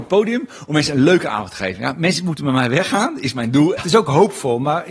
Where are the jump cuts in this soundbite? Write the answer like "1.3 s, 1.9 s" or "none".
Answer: 3.8 s